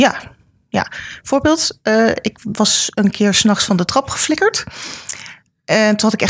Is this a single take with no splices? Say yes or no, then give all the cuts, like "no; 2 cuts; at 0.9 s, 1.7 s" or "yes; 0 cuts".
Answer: yes; 0 cuts